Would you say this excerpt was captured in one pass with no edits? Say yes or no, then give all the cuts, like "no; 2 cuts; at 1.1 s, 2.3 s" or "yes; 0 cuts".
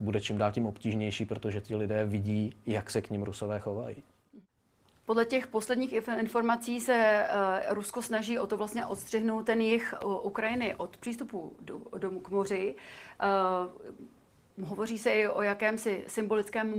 yes; 0 cuts